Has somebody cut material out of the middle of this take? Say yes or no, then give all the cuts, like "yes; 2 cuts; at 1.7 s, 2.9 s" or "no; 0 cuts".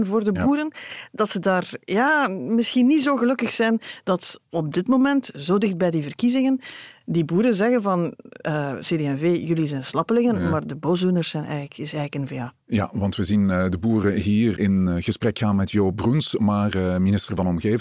no; 0 cuts